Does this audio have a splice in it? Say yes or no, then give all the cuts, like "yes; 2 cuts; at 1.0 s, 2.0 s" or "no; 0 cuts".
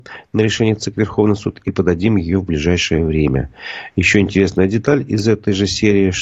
no; 0 cuts